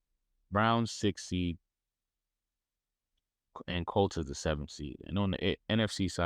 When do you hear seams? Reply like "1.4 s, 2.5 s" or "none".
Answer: none